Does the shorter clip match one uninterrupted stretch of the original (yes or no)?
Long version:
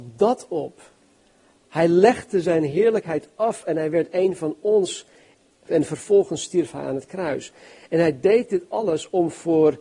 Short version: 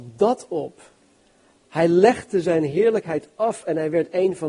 yes